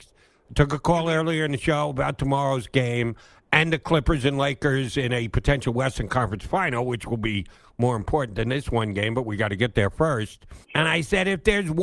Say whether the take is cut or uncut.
cut